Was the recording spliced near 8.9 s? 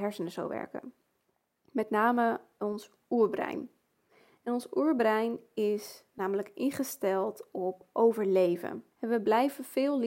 yes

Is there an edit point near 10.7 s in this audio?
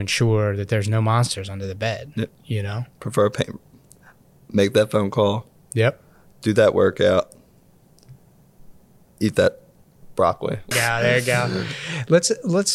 yes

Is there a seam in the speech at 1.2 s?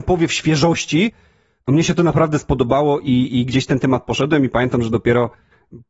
no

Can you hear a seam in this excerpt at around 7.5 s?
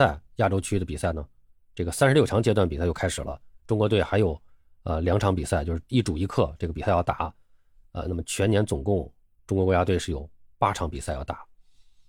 no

